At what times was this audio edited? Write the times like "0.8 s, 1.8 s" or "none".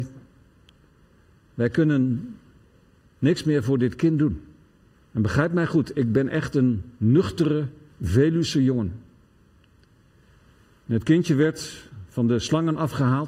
4.9 s